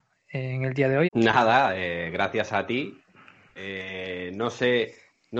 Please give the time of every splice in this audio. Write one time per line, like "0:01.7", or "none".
0:01.0